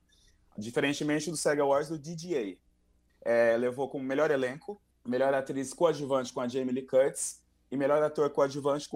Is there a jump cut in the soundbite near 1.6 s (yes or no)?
no